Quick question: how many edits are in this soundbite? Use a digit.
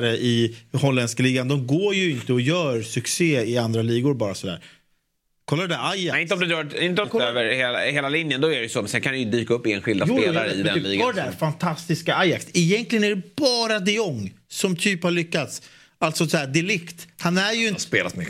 1